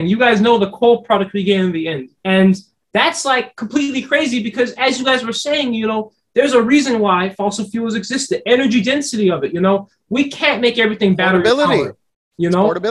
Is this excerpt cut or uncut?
cut